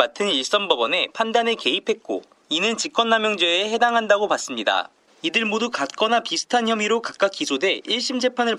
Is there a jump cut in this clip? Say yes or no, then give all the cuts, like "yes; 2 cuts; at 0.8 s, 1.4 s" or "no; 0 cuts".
yes; 1 cut; at 5.1 s